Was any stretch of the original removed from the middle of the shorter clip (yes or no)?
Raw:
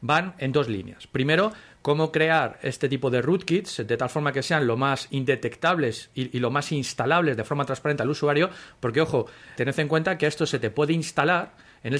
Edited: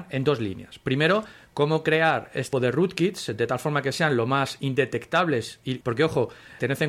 yes